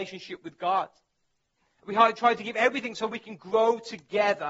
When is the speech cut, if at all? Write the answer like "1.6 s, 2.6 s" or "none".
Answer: 1.8 s